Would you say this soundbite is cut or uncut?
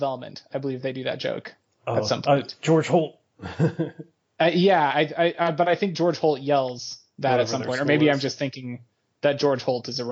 uncut